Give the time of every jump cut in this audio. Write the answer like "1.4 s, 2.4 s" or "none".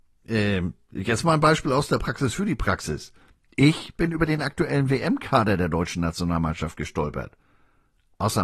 none